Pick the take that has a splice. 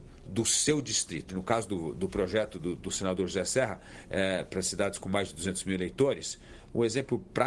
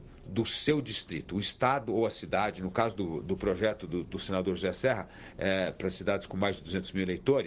first; 1 cut; at 1.3 s

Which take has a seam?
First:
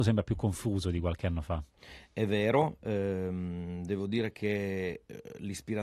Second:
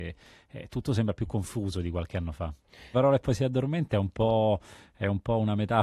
second; 1 cut; at 2.9 s

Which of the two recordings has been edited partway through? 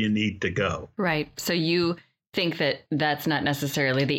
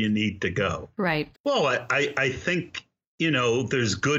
second; 1 cut; at 1.3 s

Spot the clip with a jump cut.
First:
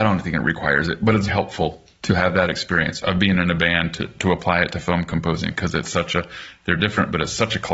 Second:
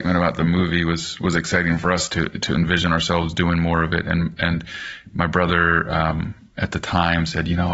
first; 1 cut; at 1.3 s

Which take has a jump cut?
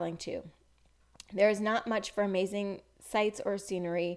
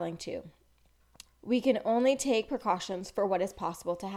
second; 1 cut; at 1.2 s

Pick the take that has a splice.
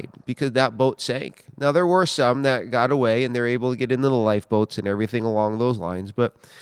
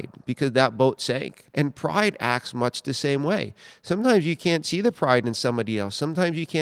second; 1 cut; at 1.5 s

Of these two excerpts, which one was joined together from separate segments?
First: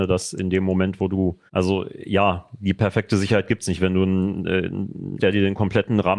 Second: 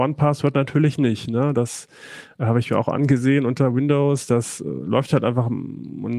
first; 2 cuts; at 1.5 s, 5.2 s

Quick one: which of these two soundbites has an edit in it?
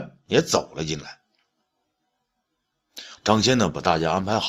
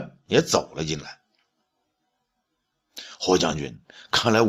first; 1 cut; at 3.2 s

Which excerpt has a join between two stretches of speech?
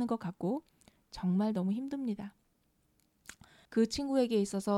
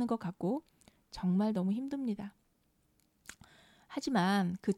first; 1 cut; at 3.7 s

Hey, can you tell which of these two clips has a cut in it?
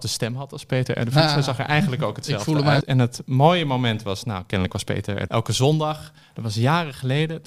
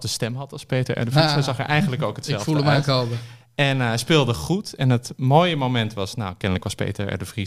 first; 2 cuts; at 2.8 s, 5.3 s

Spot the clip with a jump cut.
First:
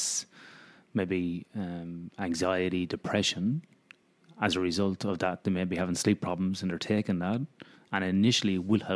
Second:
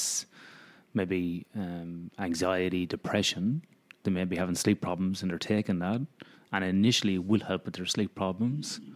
second; 1 cut; at 4.0 s

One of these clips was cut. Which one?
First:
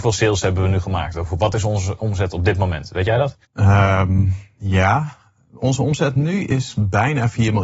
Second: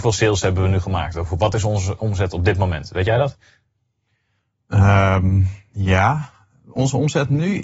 first; 1 cut; at 3.4 s

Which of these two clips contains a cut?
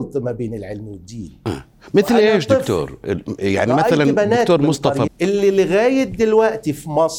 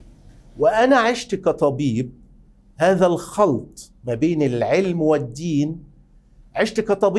first; 1 cut; at 5.1 s

